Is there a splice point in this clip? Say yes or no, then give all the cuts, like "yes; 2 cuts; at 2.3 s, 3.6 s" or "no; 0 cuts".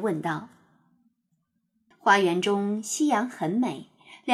yes; 1 cut; at 1.9 s